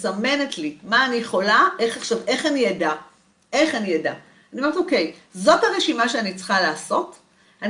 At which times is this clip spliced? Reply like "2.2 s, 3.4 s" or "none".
none